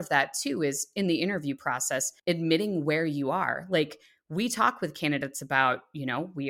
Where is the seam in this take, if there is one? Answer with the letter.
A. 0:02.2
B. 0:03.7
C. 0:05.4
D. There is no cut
A